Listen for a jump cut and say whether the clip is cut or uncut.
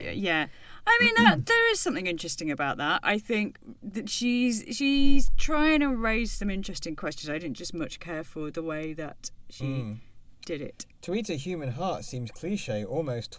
uncut